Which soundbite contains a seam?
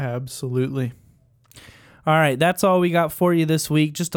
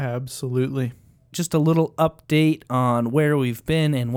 second; 1 cut; at 1.3 s

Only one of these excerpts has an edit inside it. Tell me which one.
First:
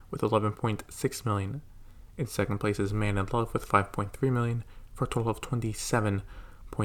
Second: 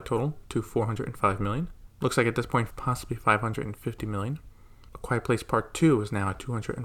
second; 1 cut; at 2.7 s

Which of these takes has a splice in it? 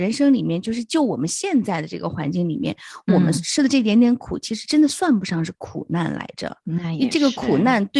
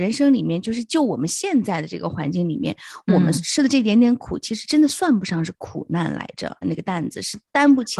second; 1 cut; at 6.6 s

